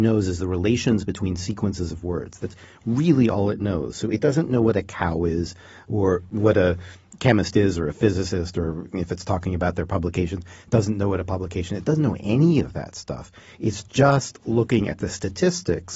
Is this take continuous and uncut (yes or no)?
yes